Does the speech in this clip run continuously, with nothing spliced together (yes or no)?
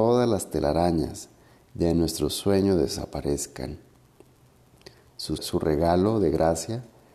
no